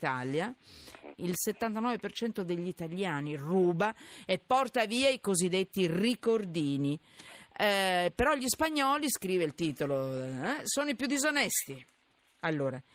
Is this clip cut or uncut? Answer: cut